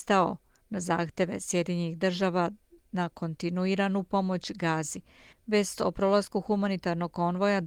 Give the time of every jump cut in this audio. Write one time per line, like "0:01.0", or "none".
0:05.3